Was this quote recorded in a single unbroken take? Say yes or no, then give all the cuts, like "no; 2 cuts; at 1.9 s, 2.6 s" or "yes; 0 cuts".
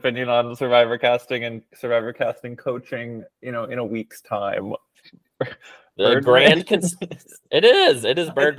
no; 1 cut; at 5.0 s